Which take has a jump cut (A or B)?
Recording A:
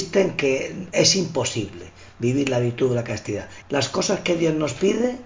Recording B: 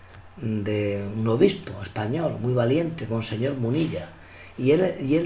A